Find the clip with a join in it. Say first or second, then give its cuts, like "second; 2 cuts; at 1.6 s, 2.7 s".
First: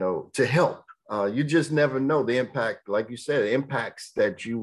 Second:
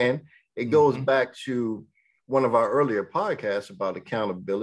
first; 1 cut; at 1.0 s